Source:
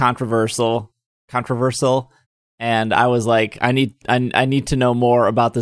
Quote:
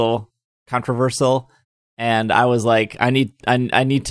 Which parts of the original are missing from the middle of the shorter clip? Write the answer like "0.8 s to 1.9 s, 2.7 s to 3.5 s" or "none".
none